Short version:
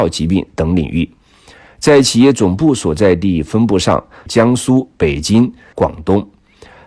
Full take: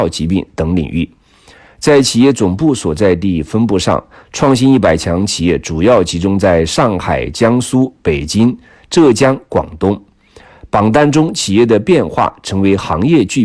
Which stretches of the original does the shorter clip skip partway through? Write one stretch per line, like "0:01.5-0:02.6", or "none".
0:04.3-0:07.3
0:08.8-0:09.5